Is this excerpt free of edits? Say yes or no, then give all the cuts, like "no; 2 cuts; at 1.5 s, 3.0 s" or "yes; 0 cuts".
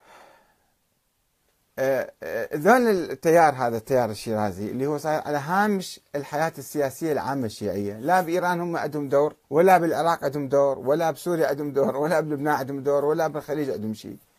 no; 1 cut; at 9.4 s